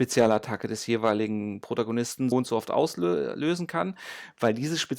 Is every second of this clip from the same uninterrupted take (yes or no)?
no